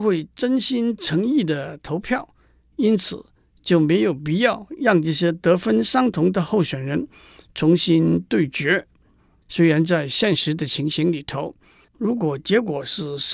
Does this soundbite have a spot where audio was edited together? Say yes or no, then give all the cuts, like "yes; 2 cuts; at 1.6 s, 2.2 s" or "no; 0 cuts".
yes; 1 cut; at 11.9 s